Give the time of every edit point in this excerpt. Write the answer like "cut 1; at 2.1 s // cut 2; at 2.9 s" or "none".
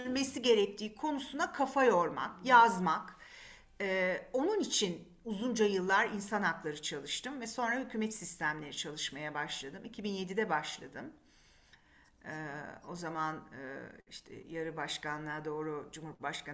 none